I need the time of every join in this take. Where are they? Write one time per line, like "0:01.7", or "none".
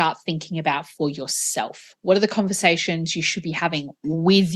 none